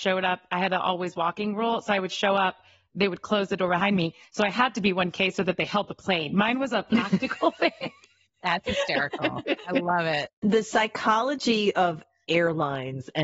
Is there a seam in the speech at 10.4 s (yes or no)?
no